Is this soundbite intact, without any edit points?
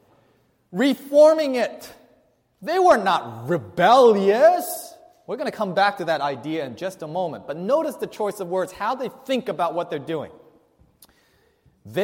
yes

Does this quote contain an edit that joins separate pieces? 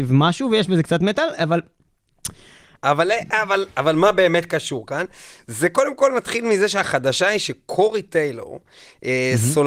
yes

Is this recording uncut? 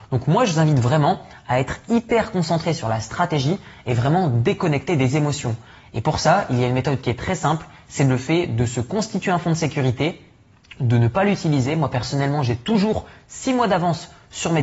yes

